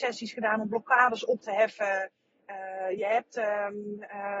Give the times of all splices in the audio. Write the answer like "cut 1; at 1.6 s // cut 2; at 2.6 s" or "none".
none